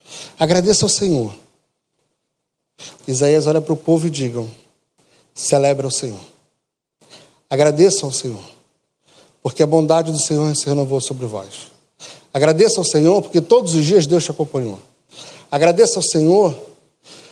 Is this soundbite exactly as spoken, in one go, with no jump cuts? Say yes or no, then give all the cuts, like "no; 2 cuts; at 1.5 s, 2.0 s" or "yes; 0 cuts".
no; 1 cut; at 3.0 s